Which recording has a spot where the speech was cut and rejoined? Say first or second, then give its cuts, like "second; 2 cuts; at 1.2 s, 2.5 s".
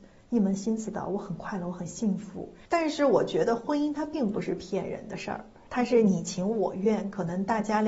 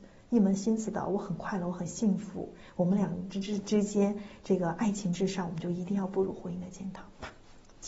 first; 1 cut; at 2.7 s